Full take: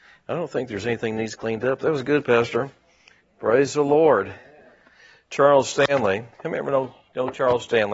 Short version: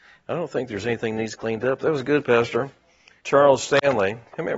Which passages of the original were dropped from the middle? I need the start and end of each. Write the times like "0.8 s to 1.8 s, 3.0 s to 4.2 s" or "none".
3.2 s to 5.2 s